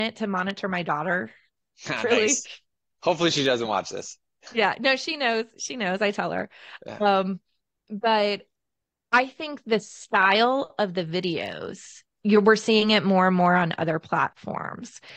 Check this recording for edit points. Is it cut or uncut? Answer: uncut